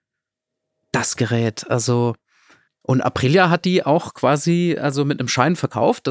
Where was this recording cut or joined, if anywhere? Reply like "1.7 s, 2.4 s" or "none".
2.7 s